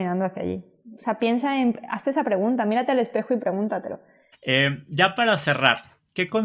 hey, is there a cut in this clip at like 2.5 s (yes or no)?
no